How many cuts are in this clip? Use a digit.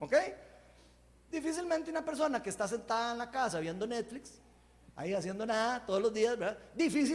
1